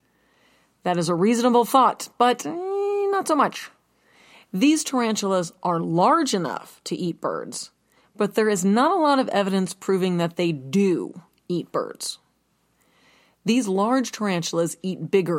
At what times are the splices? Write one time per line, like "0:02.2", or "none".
none